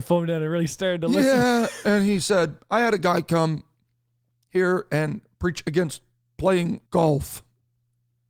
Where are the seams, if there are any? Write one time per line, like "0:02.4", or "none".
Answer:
0:06.9